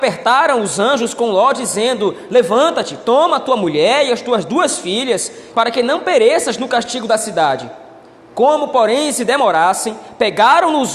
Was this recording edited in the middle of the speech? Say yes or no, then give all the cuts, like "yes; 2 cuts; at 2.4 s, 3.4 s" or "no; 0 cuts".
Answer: yes; 1 cut; at 5.5 s